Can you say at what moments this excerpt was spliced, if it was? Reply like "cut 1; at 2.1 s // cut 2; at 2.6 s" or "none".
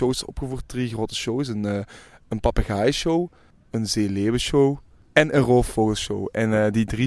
none